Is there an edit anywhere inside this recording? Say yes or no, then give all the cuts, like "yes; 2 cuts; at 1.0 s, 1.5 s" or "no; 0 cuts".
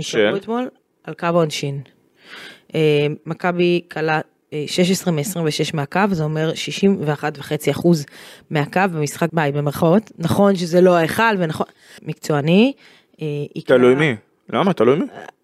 yes; 2 cuts; at 9.3 s, 12.0 s